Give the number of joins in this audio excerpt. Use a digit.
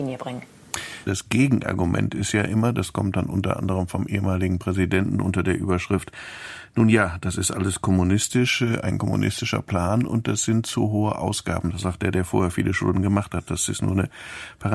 1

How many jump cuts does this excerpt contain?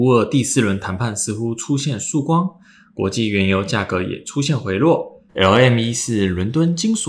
1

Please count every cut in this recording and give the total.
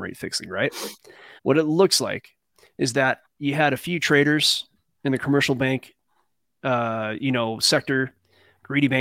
1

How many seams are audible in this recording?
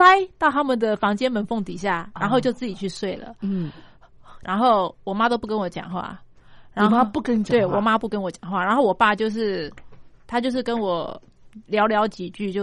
1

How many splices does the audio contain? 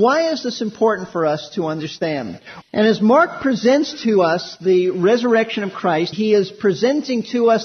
2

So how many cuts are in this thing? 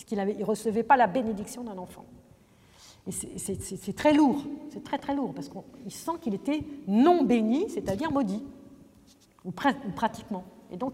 0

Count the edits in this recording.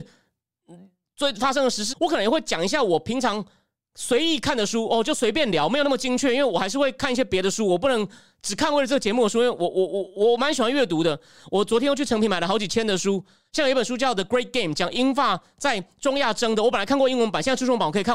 1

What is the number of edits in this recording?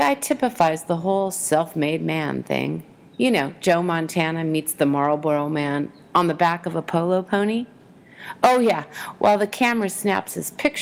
0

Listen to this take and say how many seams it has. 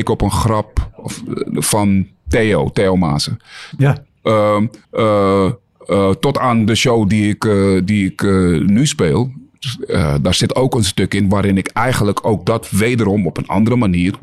2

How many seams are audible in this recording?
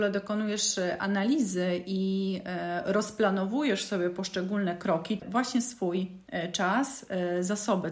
1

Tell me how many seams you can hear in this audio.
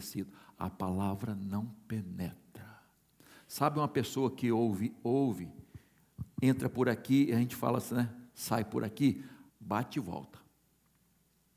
1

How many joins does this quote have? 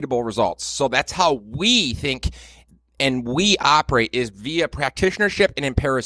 0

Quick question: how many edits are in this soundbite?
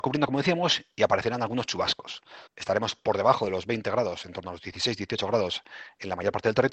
1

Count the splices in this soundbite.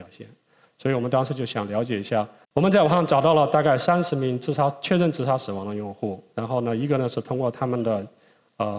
1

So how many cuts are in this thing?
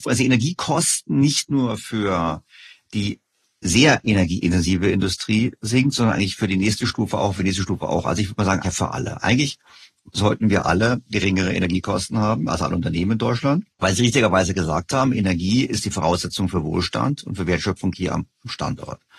2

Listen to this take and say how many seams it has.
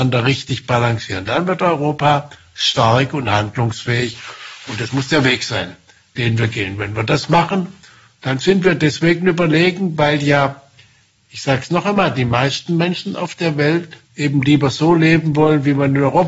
1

